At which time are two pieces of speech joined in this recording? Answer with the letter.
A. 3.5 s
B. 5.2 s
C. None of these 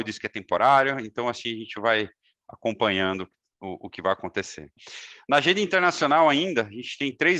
C